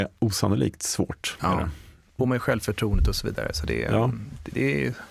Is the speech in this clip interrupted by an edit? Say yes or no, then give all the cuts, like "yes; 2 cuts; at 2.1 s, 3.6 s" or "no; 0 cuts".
yes; 1 cut; at 2.2 s